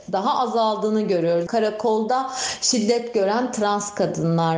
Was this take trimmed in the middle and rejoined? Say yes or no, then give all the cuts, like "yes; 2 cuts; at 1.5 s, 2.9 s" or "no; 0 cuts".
yes; 1 cut; at 1.5 s